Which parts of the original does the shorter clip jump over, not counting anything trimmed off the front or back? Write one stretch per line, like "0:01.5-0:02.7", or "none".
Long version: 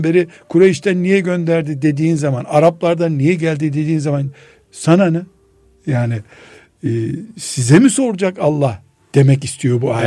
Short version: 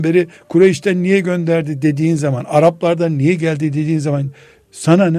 none